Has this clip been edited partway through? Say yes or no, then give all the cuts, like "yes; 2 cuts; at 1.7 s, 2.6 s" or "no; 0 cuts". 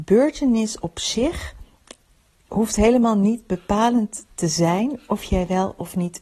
no; 0 cuts